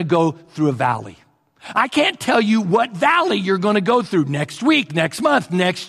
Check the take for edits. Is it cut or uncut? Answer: uncut